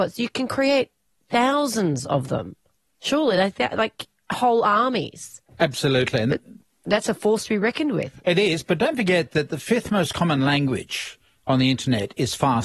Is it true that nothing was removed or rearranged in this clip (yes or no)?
yes